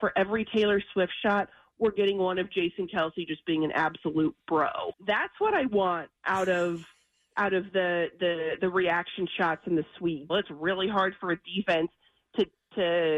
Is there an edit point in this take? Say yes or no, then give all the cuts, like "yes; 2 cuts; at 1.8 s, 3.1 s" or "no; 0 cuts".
yes; 2 cuts; at 4.9 s, 10.3 s